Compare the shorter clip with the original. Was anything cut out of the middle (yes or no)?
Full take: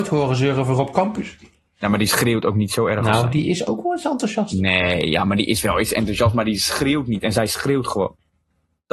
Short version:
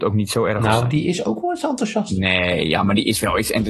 no